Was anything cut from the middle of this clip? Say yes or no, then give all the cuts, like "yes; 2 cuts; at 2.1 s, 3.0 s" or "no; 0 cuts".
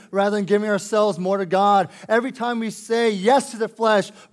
no; 0 cuts